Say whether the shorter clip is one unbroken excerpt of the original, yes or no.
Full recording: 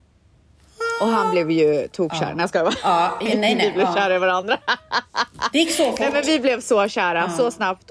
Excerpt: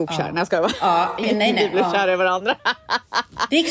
yes